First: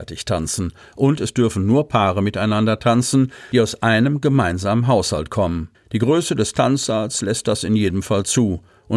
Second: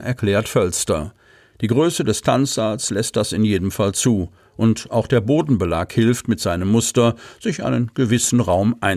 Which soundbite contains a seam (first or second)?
first